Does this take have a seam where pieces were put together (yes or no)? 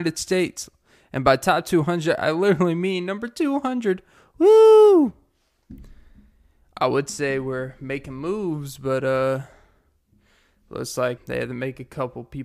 yes